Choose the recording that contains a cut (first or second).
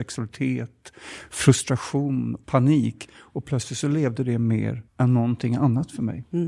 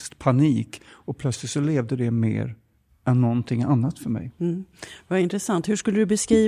first